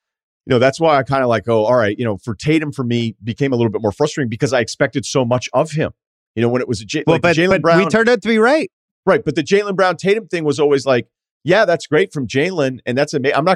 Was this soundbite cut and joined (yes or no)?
no